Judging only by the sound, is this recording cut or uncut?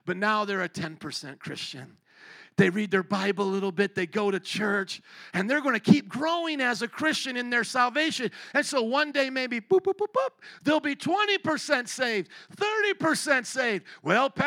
uncut